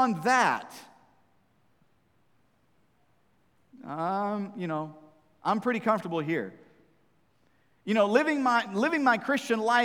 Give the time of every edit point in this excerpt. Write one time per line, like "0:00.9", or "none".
none